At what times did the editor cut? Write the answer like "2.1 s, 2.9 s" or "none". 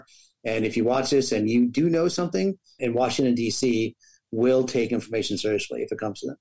2.8 s